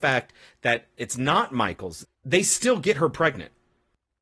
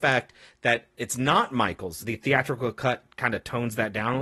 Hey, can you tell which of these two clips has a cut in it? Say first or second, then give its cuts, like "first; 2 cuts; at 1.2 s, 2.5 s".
first; 1 cut; at 2.0 s